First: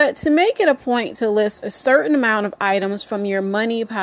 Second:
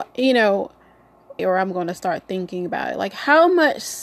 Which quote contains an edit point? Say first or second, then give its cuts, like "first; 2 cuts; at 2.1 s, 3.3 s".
second; 1 cut; at 1.4 s